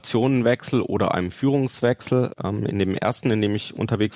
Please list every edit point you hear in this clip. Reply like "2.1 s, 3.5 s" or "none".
none